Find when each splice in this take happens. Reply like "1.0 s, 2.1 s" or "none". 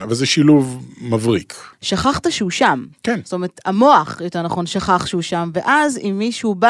1.7 s